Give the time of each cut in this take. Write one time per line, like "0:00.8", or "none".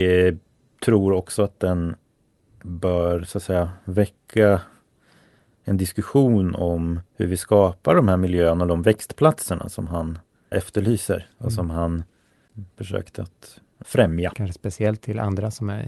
0:07.1
0:10.5
0:14.3